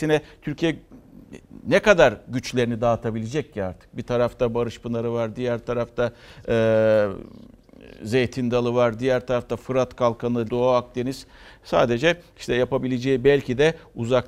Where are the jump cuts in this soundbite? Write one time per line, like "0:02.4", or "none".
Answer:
0:10.5